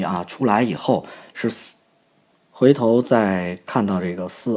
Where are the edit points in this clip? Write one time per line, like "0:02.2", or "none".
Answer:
0:02.3